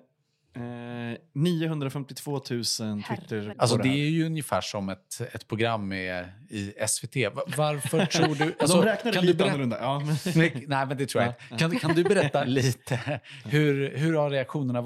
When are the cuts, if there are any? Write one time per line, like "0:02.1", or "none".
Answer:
0:03.5